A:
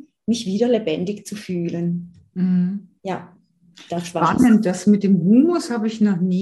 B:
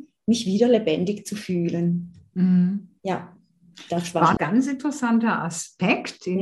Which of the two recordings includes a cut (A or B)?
B